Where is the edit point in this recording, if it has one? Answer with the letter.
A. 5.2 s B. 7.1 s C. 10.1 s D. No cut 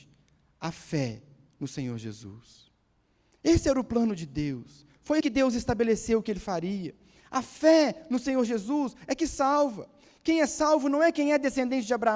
A